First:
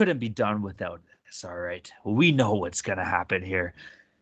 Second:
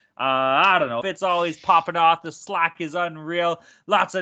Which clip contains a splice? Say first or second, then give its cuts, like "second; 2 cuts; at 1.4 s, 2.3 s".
second; 1 cut; at 1.0 s